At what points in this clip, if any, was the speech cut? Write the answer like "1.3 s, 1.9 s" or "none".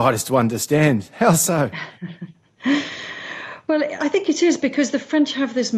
none